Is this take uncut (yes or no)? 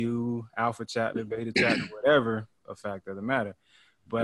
no